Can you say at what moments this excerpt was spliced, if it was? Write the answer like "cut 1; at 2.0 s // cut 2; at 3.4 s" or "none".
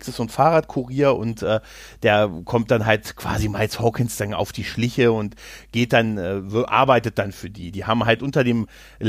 none